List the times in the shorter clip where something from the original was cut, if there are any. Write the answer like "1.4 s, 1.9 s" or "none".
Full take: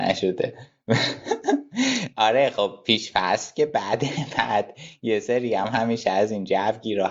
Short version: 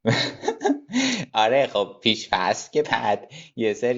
2.8 s